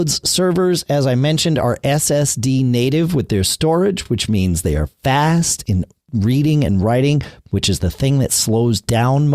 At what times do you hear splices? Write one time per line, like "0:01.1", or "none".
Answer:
none